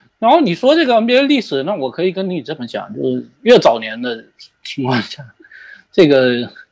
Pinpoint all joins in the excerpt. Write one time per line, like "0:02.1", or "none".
none